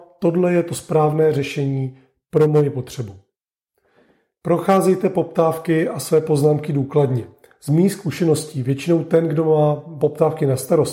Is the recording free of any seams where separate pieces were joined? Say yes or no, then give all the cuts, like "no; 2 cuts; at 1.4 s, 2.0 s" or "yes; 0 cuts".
yes; 0 cuts